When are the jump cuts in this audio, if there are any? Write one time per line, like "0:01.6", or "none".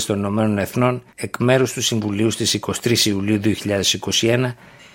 0:01.1